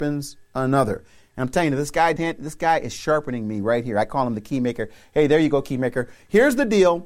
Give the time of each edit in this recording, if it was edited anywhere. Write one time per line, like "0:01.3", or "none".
0:02.2